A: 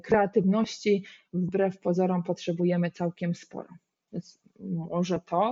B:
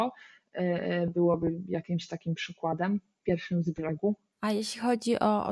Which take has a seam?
A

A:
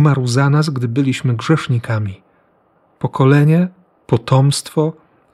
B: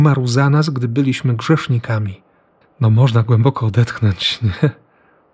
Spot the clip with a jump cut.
B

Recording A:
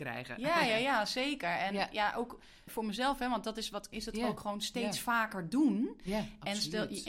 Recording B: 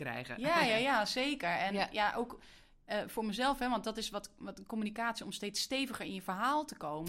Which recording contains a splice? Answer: A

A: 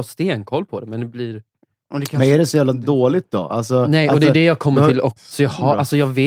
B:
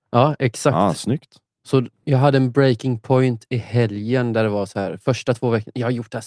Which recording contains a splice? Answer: A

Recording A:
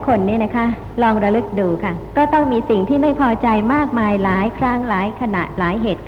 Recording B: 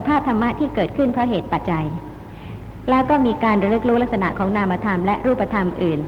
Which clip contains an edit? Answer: B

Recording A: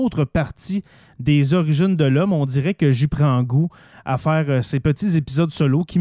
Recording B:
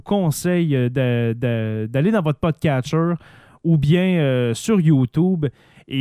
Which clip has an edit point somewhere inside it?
A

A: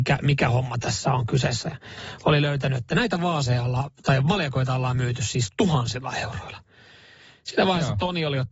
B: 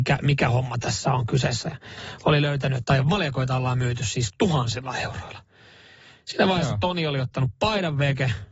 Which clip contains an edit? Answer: B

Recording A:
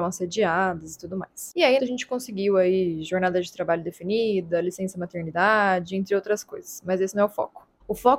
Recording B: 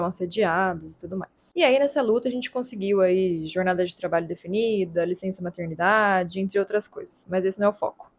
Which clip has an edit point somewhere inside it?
A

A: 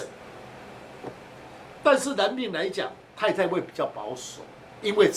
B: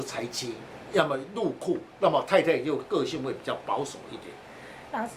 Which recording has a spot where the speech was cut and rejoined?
B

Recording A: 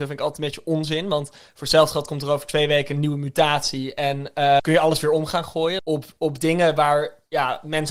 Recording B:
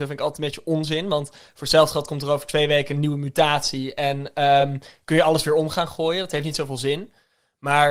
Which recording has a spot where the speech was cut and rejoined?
A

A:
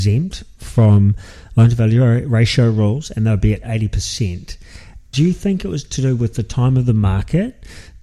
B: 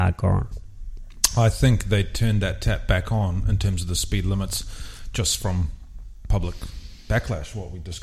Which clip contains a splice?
A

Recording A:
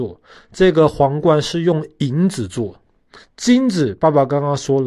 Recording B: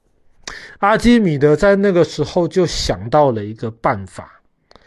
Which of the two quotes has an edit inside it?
A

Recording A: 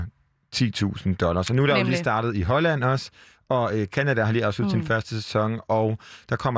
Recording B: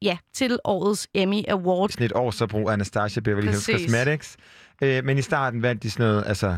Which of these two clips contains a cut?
B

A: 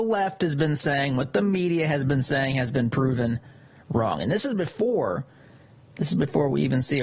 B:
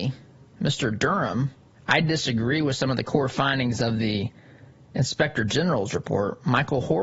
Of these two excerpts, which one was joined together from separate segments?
B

